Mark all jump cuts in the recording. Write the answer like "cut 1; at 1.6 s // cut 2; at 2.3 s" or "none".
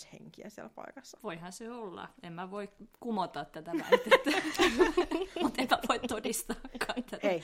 cut 1; at 1.2 s